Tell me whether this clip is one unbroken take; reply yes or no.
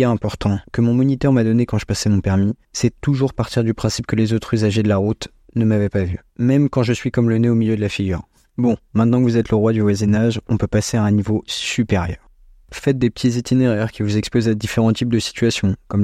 yes